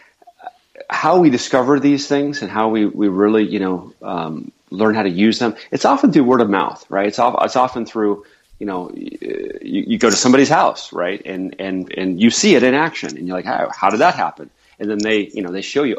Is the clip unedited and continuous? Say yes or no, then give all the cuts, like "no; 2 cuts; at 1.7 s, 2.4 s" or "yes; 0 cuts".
yes; 0 cuts